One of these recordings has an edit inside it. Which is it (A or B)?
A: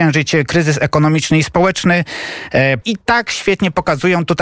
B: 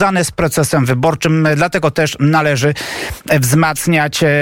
A